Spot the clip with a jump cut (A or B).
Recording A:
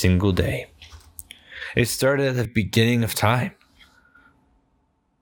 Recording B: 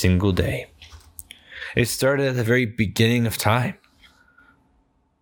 A